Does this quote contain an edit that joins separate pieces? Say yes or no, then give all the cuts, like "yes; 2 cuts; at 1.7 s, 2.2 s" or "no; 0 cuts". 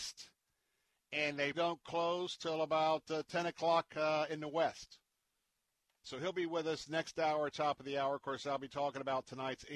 yes; 2 cuts; at 1.5 s, 6.0 s